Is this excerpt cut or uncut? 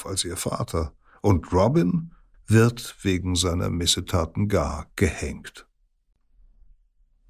cut